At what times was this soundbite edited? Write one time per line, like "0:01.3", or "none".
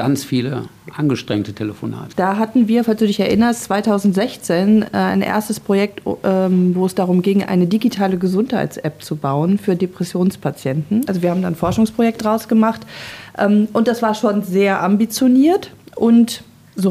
0:02.1
0:11.1